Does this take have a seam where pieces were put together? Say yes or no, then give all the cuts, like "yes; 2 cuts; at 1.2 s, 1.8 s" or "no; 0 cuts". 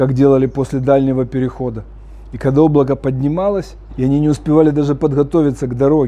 yes; 1 cut; at 3.9 s